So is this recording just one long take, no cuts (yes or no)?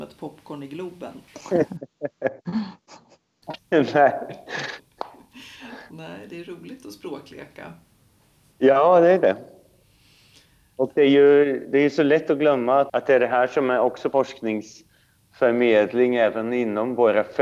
yes